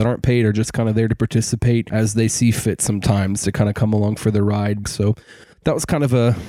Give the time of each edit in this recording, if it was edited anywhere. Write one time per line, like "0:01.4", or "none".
0:04.8